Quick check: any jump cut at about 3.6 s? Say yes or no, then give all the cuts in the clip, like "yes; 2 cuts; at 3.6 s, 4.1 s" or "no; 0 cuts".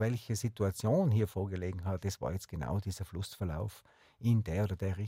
no; 1 cut; at 2.0 s